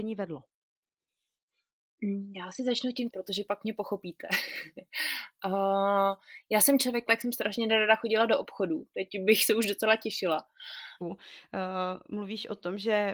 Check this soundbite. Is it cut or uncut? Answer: cut